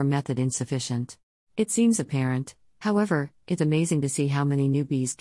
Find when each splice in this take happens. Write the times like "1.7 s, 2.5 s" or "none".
1.4 s, 3.6 s